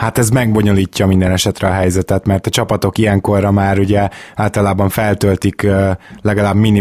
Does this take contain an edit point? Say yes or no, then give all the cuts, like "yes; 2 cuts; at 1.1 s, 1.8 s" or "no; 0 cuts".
no; 0 cuts